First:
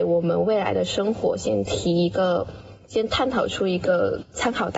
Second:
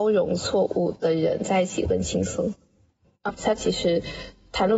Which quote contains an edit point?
second; 2 cuts; at 1.9 s, 3.3 s

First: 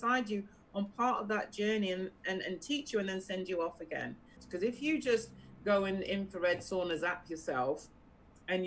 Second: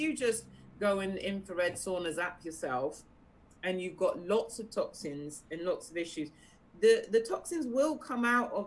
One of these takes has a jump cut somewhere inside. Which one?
first; 1 cut; at 4.4 s

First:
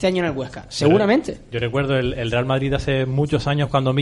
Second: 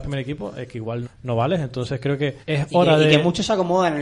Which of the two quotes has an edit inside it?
second; 2 cuts; at 1.0 s, 2.4 s

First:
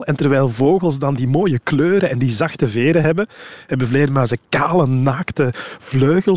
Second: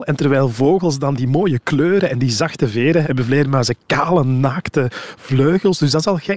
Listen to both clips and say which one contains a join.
second; 1 cut; at 3.0 s

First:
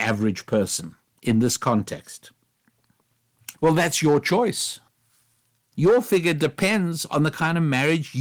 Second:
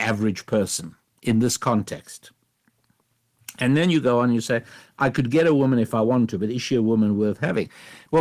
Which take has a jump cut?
first; 2 cuts; at 3.5 s, 5.7 s

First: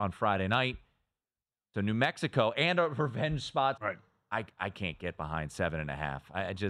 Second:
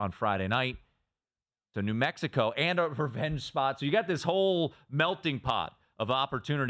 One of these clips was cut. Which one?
first; 1 cut; at 3.8 s

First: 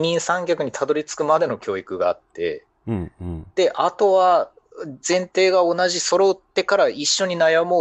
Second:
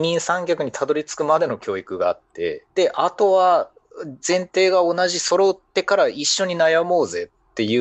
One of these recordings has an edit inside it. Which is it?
second; 1 cut; at 2.7 s

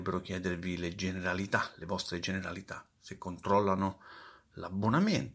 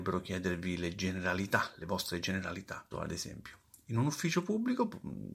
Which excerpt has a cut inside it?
second; 1 cut; at 2.9 s

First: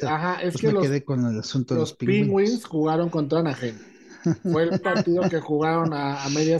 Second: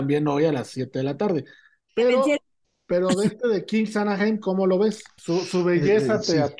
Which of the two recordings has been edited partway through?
second; 1 cut; at 5.2 s

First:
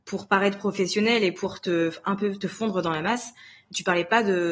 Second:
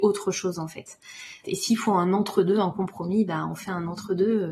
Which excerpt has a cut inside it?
second; 1 cut; at 1.4 s

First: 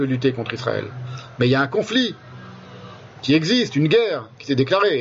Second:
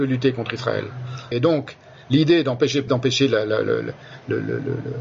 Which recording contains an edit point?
second; 2 cuts; at 1.3 s, 2.9 s

